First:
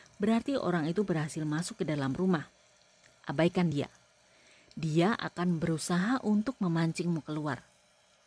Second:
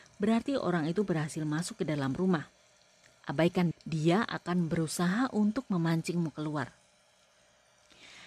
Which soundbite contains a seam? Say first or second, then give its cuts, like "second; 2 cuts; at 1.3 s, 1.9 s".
second; 1 cut; at 3.7 s